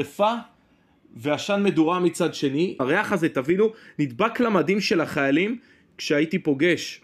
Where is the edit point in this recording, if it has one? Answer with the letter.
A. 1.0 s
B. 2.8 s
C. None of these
B